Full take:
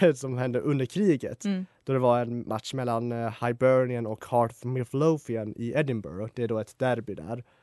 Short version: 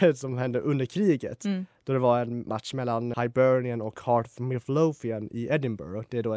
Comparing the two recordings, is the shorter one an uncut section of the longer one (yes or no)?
no